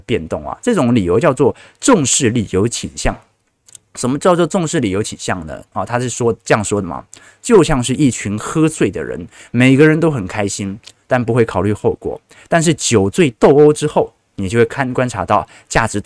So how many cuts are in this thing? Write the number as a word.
one